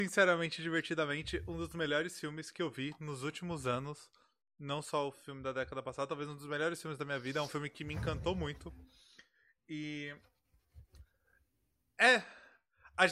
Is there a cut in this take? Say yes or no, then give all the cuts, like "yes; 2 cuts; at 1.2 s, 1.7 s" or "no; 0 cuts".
no; 0 cuts